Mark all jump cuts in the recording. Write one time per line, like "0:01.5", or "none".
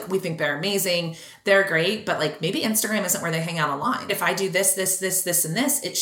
0:04.1